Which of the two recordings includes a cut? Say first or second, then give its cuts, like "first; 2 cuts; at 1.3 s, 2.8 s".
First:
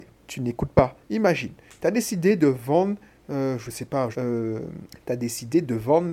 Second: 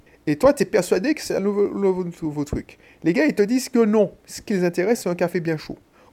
first; 2 cuts; at 1.0 s, 4.1 s